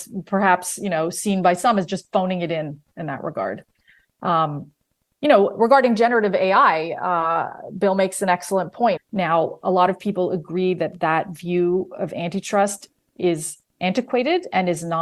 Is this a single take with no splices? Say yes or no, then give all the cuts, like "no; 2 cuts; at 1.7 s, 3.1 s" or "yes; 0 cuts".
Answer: no; 1 cut; at 9.0 s